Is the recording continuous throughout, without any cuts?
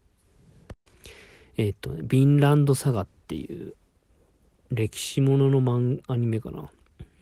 yes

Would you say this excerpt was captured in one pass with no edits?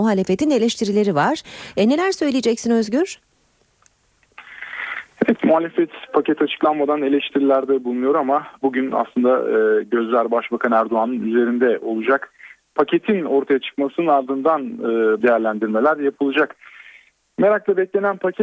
no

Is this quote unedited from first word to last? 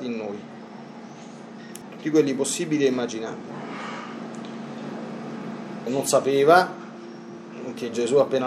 no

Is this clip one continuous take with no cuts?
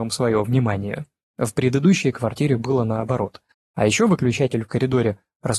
no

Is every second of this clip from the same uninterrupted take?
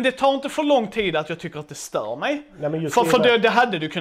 yes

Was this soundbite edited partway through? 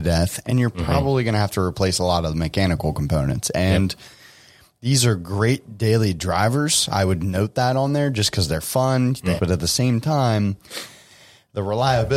yes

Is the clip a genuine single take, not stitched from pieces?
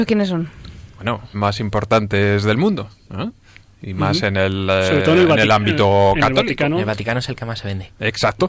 no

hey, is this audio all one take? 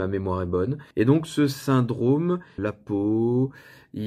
no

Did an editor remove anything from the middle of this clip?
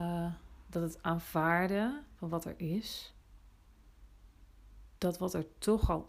no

